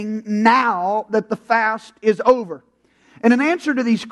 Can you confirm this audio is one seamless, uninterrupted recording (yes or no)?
yes